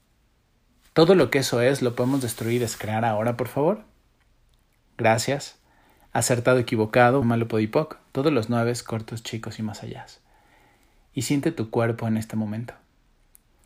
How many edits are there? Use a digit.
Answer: 1